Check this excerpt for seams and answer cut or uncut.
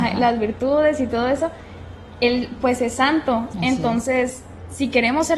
uncut